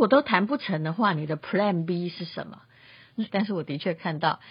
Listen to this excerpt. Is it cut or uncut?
cut